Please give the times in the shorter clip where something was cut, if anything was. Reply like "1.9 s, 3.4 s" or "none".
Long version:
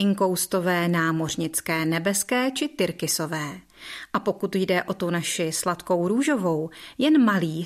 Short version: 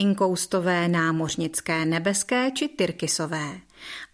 none